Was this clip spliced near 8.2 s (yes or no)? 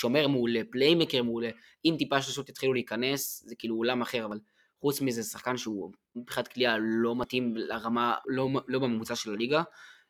yes